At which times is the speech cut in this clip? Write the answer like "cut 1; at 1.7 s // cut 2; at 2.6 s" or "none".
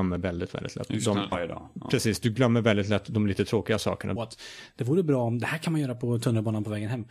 cut 1; at 1.3 s // cut 2; at 4.2 s